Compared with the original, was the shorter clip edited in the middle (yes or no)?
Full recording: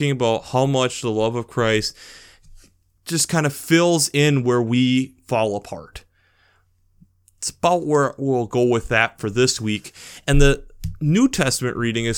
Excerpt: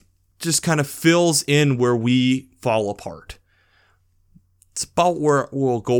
no